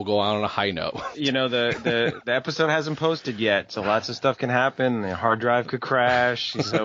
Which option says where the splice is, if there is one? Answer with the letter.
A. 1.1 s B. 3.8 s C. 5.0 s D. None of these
A